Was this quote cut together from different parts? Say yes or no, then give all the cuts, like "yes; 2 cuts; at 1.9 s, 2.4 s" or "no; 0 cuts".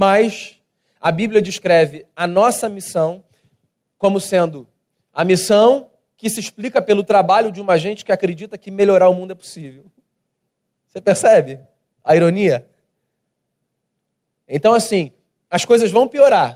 no; 0 cuts